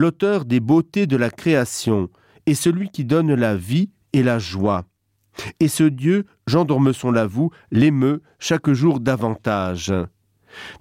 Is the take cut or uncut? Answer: uncut